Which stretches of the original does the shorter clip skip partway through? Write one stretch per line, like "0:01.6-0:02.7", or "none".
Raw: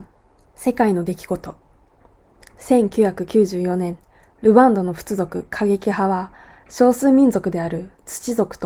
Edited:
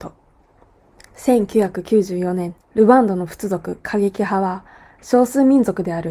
0:04.1-0:04.3